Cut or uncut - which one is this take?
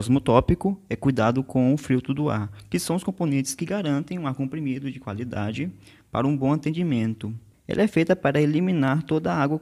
cut